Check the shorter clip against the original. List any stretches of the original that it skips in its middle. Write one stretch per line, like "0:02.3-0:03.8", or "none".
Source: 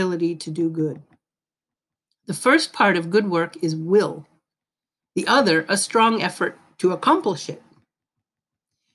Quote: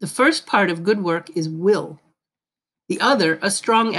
none